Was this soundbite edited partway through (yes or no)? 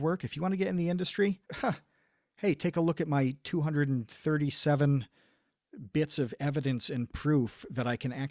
yes